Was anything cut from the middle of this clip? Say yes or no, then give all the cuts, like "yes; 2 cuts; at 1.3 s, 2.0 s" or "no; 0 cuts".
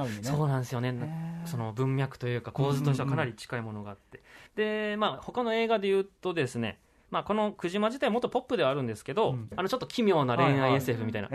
yes; 2 cuts; at 4.5 s, 9.5 s